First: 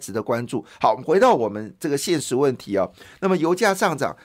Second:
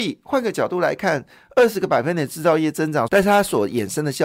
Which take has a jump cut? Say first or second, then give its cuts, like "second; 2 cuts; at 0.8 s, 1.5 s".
second; 1 cut; at 3.1 s